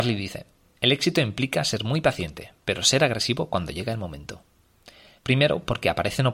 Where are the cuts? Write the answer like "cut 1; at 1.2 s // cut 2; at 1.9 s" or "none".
cut 1; at 5.2 s